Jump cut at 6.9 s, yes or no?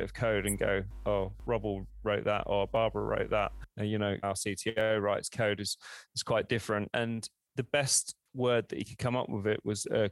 yes